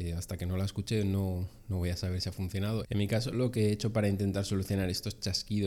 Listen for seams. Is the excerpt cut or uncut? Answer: cut